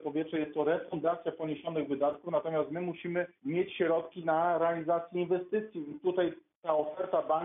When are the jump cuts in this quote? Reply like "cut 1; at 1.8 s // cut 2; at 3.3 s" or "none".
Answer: cut 1; at 3.4 s